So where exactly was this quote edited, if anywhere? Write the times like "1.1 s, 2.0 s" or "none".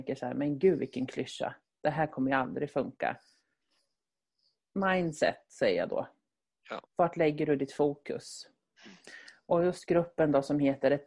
none